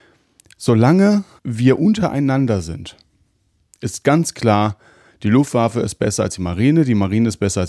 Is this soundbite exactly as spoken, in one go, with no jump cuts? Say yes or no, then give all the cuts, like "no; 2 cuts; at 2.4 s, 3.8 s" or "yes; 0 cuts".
no; 1 cut; at 1.4 s